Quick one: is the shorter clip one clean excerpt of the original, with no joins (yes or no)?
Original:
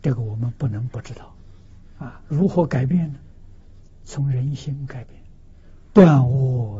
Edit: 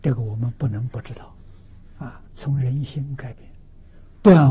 no